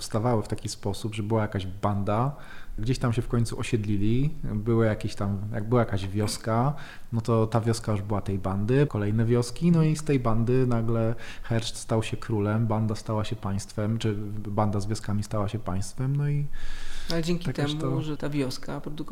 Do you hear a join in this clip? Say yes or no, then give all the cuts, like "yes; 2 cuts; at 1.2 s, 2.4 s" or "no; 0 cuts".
yes; 3 cuts; at 2.8 s, 8.9 s, 18.2 s